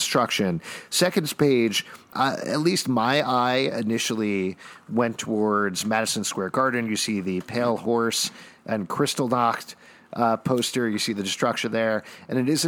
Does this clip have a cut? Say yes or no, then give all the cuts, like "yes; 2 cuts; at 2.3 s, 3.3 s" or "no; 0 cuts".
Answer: yes; 1 cut; at 2.1 s